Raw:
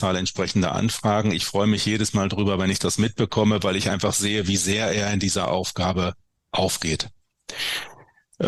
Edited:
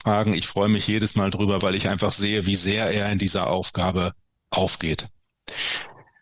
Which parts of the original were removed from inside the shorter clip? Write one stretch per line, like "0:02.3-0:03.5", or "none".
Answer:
0:02.6-0:03.6

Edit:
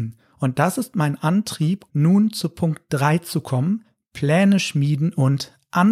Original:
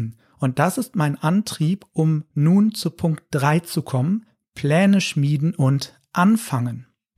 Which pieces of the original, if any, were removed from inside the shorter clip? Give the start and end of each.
0:01.9-0:02.3

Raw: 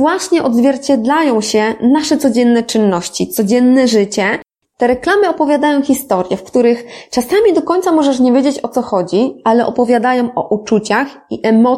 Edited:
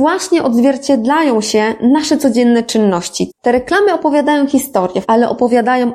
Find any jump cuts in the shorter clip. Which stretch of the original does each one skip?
0:03.3-0:04.6
0:06.4-0:09.4

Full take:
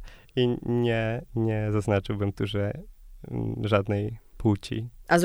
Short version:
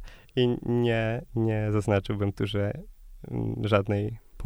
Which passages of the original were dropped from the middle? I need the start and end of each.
none

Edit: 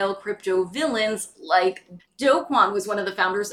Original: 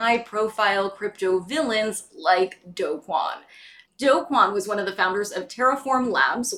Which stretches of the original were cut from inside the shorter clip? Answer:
0:02.7-0:03.8

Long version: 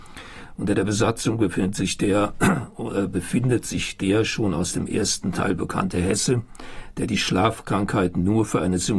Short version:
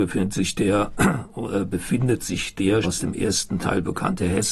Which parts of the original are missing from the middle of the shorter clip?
0:04.2-0:04.6

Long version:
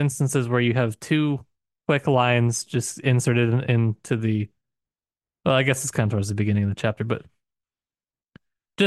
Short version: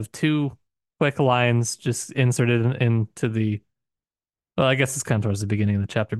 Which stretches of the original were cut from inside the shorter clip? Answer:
none

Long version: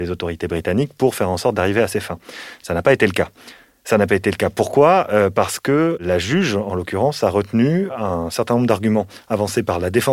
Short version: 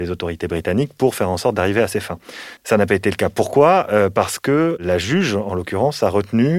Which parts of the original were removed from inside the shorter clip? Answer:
0:02.6-0:03.8

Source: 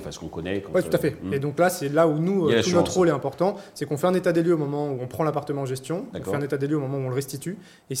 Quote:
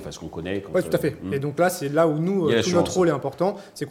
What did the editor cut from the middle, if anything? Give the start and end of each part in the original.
none

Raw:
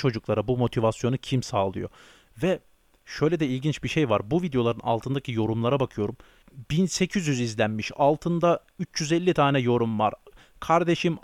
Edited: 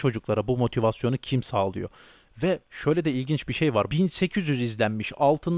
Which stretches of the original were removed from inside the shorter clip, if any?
0:02.6-0:03.0
0:04.2-0:06.7

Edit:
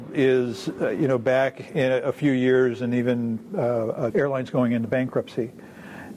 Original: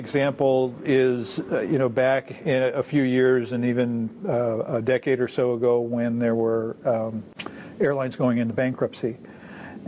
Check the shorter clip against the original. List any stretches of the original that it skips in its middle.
0:04.8-0:07.8

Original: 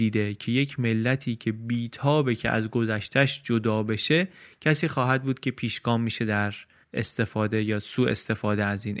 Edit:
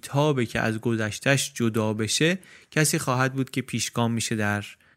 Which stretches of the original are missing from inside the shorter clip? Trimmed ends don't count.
none

